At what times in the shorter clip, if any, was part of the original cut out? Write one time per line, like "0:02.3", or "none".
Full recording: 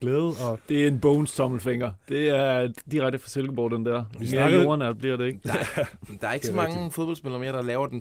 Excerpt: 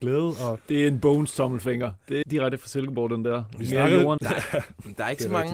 0:02.2
0:04.2

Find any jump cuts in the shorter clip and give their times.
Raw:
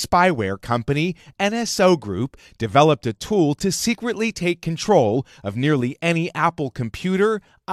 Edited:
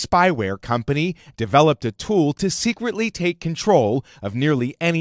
0:01.3

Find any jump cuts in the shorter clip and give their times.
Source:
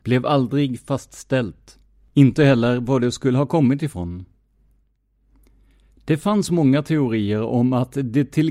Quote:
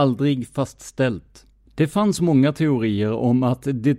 0:01.7

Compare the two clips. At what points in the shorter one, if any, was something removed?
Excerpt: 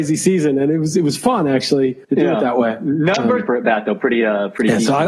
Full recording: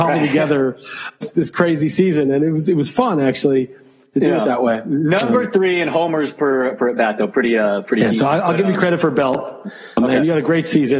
0:02.0
0:03.5

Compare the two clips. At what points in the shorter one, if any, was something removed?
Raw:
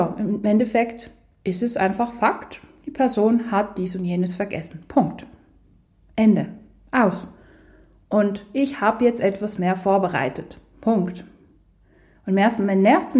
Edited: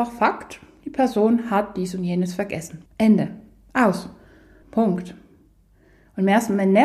0:02.9
0:04.6

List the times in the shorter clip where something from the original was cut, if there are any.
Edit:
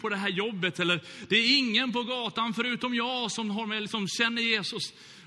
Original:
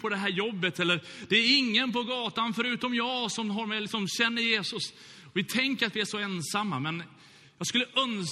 none

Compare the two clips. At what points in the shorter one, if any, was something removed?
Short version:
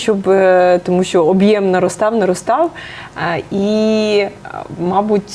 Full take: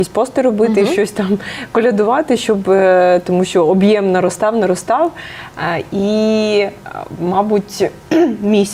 none

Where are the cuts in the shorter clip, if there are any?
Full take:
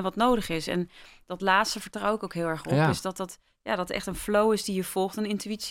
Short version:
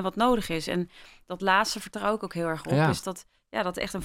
0:03.0

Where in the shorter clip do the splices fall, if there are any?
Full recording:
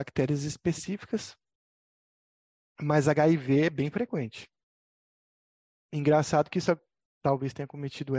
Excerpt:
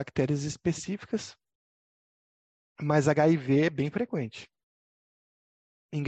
none

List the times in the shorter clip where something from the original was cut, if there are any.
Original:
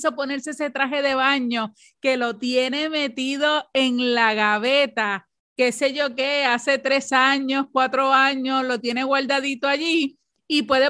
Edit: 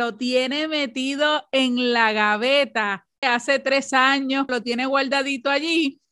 0:03.2
0:04.5

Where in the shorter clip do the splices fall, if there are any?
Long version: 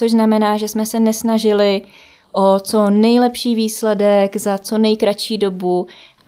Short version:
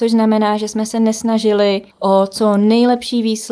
0:01.9

